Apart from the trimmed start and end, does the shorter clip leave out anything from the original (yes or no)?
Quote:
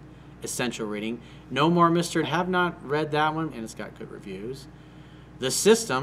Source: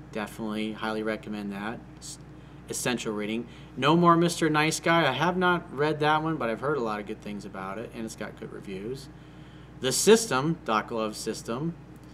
yes